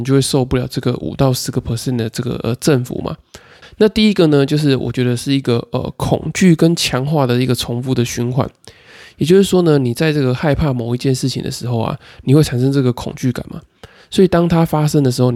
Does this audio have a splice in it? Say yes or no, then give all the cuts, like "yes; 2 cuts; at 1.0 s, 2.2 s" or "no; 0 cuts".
yes; 1 cut; at 3.6 s